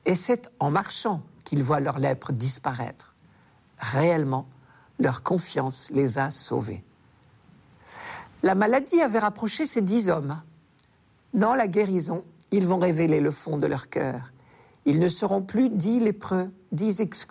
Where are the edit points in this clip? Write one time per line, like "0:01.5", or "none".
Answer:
none

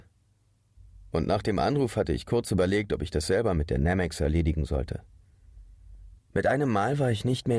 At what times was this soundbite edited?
0:01.1
0:06.2

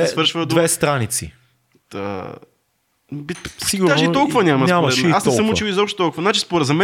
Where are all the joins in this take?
none

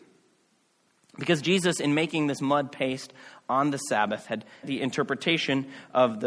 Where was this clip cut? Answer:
0:04.6

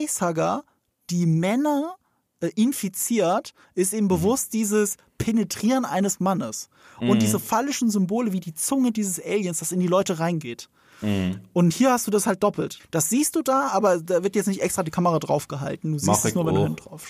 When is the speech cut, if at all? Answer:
0:12.8

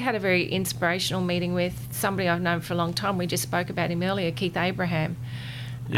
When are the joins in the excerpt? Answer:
none

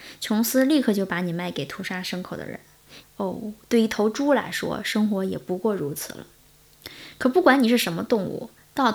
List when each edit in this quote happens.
0:03.0

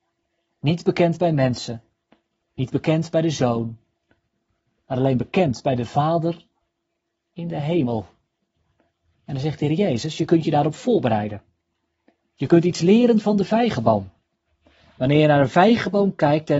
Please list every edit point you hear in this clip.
0:02.4

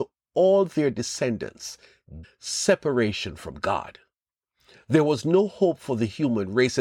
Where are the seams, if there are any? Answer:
0:02.2

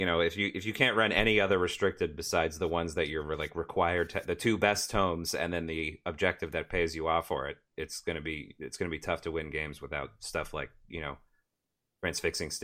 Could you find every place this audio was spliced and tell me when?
none

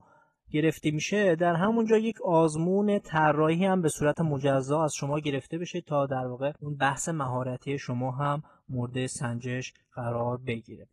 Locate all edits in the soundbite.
0:06.6

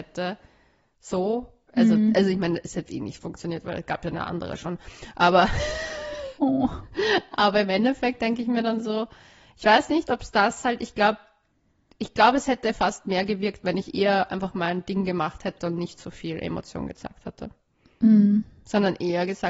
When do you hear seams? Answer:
none

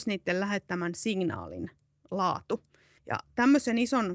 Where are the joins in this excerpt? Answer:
0:03.0

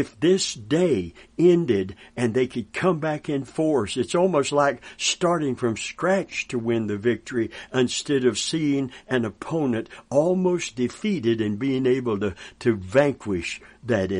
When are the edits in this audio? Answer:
none

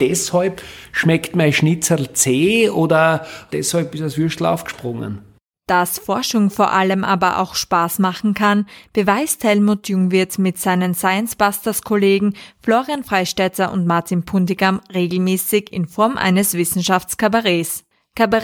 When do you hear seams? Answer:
none

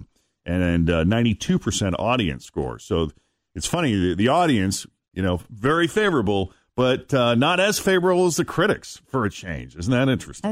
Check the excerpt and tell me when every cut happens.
none

